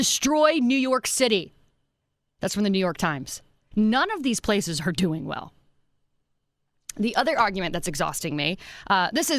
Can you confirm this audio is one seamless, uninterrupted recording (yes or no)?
no